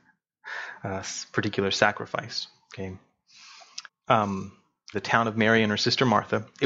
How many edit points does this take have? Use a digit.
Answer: 2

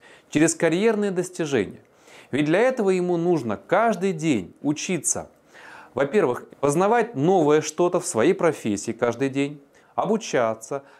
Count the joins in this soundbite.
2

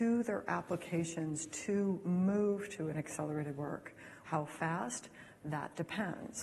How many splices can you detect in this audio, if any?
1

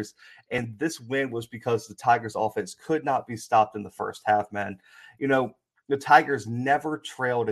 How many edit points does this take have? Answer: 0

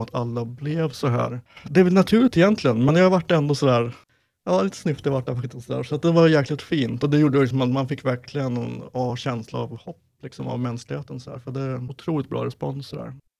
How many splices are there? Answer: 0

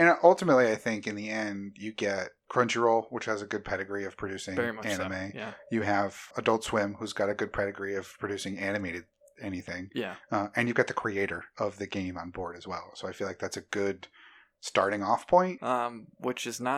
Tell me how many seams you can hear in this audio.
2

